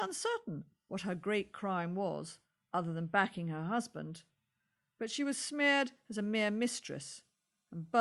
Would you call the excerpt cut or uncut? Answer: uncut